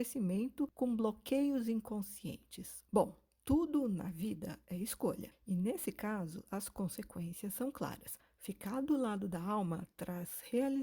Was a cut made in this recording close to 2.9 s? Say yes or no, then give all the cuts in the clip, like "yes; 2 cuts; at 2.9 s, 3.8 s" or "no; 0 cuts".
yes; 1 cut; at 2.9 s